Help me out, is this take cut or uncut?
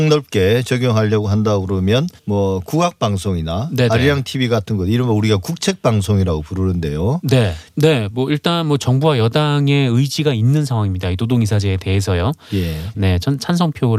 cut